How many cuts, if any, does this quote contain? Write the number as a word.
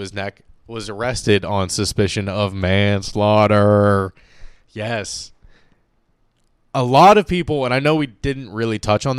zero